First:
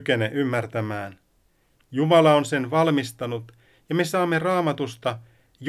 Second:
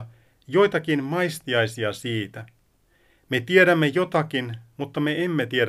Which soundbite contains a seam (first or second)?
first